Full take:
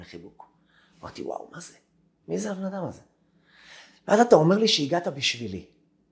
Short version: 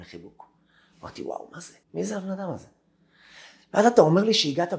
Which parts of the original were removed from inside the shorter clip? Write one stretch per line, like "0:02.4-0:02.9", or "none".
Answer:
0:01.8-0:02.2